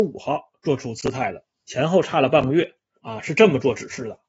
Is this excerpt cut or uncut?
cut